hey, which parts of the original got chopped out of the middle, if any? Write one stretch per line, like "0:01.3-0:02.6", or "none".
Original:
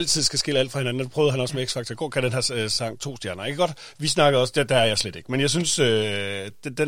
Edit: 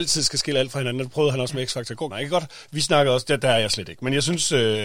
0:02.1-0:03.4